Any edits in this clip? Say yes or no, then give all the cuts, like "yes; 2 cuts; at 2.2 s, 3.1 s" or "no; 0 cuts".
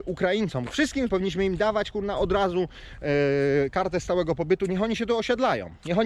yes; 1 cut; at 1.1 s